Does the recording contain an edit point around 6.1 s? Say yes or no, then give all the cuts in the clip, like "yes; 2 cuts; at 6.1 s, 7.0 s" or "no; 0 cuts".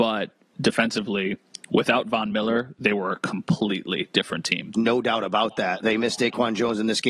no; 1 cut; at 4.7 s